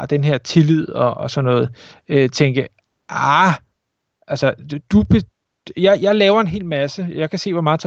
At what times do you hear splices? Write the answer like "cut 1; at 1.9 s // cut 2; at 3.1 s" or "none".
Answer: none